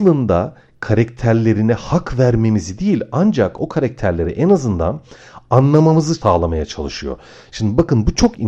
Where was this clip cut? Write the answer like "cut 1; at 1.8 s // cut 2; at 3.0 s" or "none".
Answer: none